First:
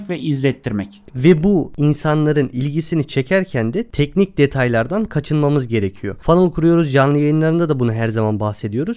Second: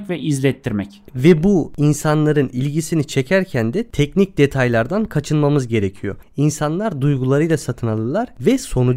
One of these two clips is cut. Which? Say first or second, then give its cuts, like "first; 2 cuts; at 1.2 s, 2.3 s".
second; 1 cut; at 6.2 s